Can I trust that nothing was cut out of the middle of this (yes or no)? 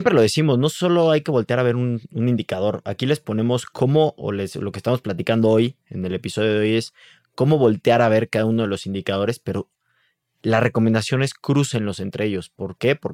yes